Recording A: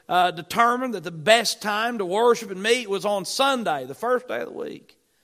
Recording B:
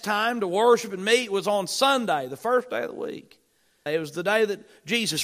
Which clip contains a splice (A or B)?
B